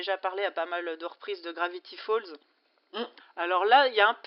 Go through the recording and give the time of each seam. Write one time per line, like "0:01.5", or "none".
0:03.2